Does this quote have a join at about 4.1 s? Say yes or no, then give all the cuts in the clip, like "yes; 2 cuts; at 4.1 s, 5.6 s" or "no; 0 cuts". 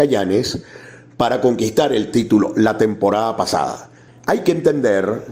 yes; 1 cut; at 4.1 s